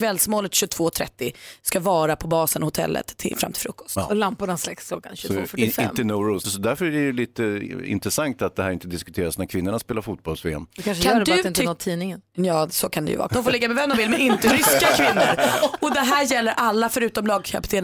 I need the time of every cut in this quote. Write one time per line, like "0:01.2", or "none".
0:06.4
0:13.3